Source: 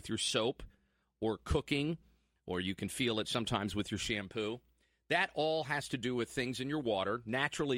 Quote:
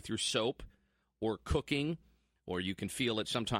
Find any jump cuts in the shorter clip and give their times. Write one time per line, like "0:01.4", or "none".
none